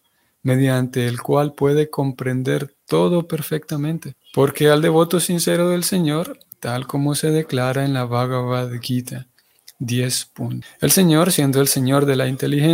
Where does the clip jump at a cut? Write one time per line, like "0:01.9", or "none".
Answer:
0:04.2
0:06.5
0:10.6